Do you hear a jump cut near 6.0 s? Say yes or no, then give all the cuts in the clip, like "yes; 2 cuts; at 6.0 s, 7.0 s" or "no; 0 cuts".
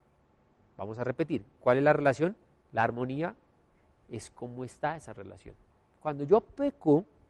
no; 1 cut; at 2.5 s